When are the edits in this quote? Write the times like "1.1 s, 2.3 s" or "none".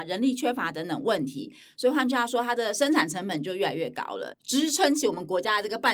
4.3 s